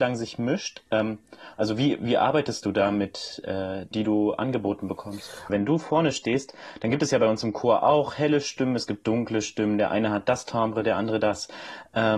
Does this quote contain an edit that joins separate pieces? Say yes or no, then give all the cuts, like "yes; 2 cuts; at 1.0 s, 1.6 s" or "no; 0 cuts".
yes; 2 cuts; at 3.9 s, 5.5 s